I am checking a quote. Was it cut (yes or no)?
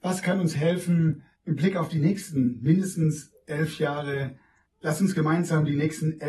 yes